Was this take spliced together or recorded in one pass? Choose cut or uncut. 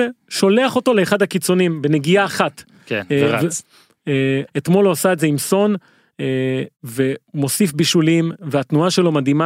cut